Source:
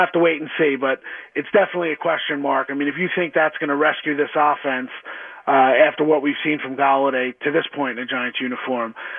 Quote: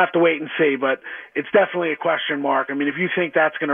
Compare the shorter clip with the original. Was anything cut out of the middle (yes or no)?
no